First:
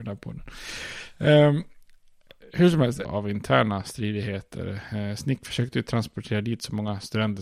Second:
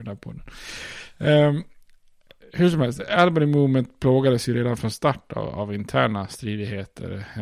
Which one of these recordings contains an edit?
first; 1 cut; at 3.0 s

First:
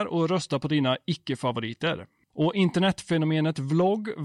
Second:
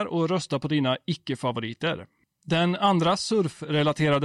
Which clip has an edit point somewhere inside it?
first; 1 cut; at 2.3 s

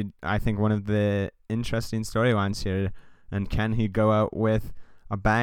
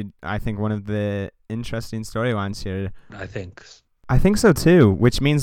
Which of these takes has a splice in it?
second; 1 cut; at 3.1 s

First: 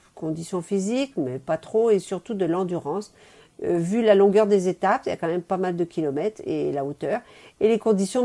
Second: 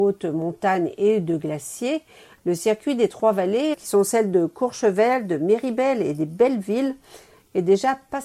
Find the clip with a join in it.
second; 1 cut; at 3.7 s

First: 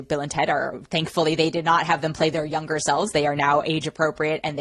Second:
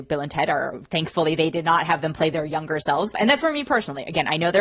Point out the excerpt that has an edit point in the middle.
second; 1 cut; at 3.1 s

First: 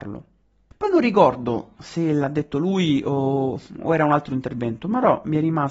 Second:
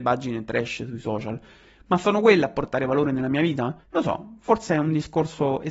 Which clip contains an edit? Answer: second; 1 cut; at 3.8 s

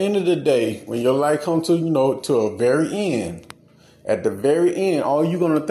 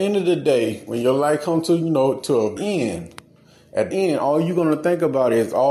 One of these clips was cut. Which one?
second; 2 cuts; at 2.6 s, 3.9 s

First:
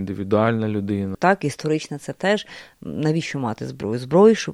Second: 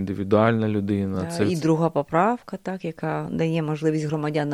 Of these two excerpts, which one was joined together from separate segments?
first; 1 cut; at 1.1 s

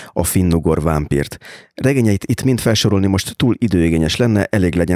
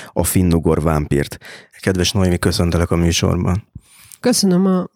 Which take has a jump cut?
second; 1 cut; at 1.7 s

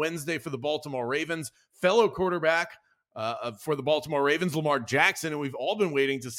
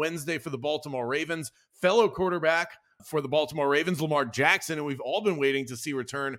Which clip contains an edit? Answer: second; 1 cut; at 3.0 s

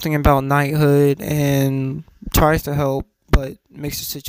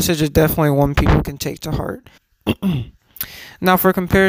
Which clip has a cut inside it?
second; 1 cut; at 2.2 s

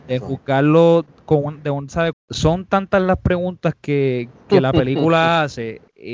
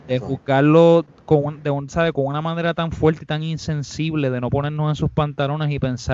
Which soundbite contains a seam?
first; 1 cut; at 2.1 s

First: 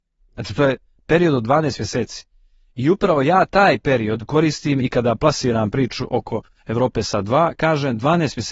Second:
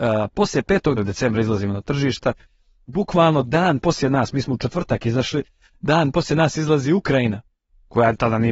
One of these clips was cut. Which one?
second; 1 cut; at 1.0 s

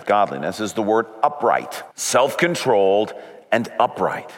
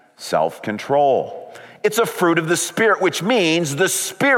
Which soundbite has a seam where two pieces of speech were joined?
first; 1 cut; at 1.9 s

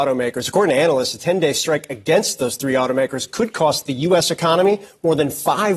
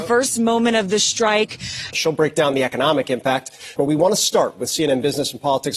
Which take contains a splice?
second; 2 cuts; at 1.9 s, 3.8 s

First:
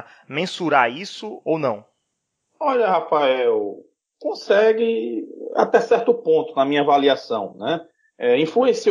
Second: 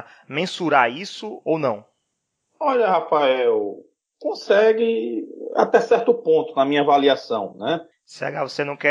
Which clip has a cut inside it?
second; 1 cut; at 7.9 s

